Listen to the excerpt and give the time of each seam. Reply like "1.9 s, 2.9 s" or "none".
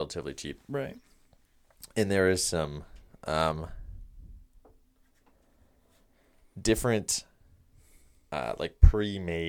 none